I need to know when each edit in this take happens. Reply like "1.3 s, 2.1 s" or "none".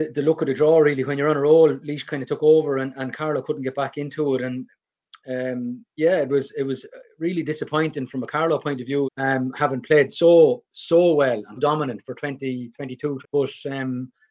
9.0 s, 11.6 s, 13.2 s